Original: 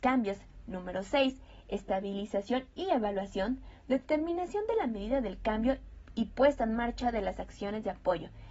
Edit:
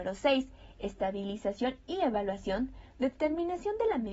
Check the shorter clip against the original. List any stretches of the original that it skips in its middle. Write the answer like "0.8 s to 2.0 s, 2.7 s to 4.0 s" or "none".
none